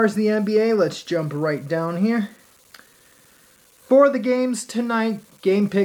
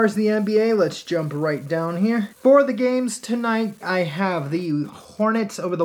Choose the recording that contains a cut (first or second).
second